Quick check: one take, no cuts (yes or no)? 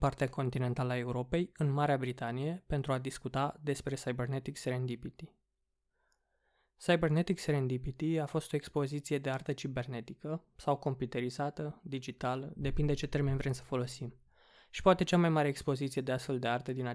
yes